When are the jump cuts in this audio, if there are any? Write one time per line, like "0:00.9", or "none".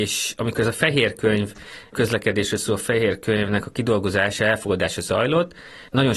none